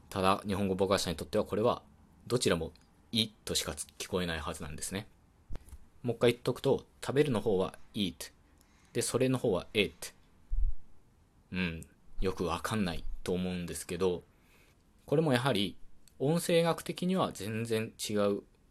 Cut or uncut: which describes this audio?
uncut